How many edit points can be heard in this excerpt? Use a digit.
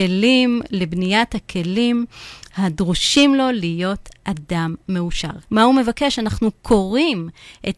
1